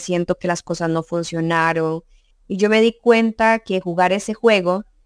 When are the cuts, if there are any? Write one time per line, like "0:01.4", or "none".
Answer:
0:02.3